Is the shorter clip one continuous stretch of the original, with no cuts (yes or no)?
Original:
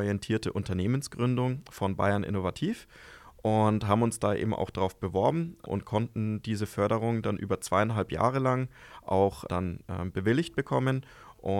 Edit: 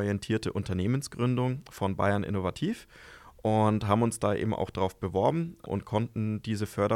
yes